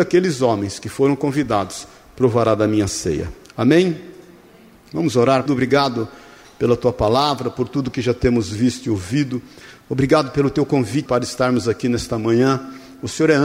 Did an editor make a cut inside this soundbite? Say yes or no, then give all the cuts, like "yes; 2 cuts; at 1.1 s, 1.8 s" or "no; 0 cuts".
yes; 2 cuts; at 5.5 s, 11.1 s